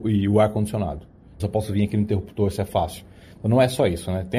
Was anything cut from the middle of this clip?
yes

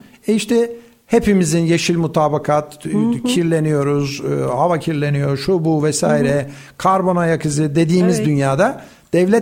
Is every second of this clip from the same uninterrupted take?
yes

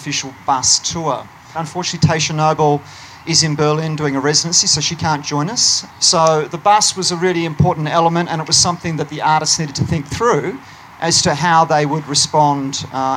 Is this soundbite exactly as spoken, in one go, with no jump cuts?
no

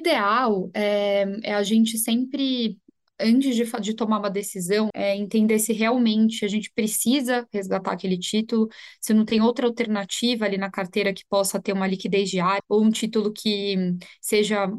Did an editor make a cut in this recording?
yes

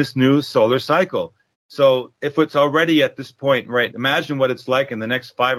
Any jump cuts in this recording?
yes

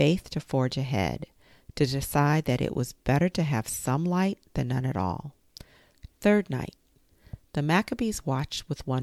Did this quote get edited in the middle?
yes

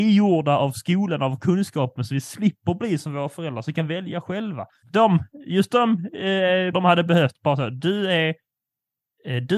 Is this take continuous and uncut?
no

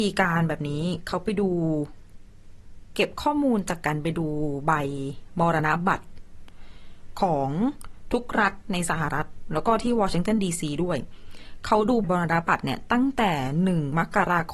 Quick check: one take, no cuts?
no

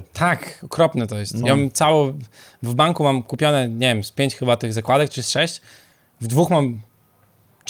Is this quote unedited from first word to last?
yes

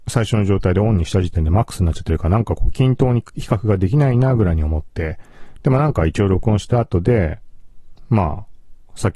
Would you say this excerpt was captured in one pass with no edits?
yes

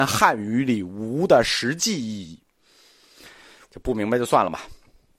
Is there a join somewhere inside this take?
yes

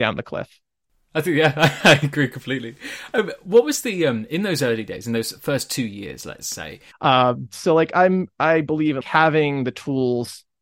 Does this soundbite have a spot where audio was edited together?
yes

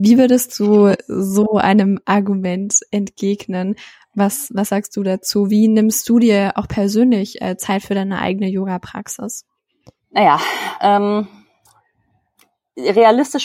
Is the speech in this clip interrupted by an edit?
yes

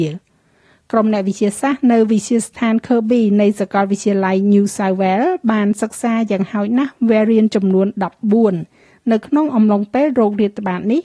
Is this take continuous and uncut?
yes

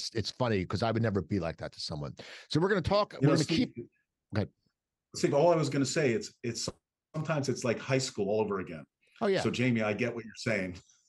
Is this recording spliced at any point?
no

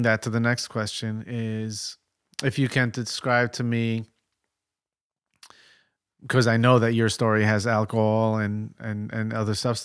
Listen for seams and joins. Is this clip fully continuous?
yes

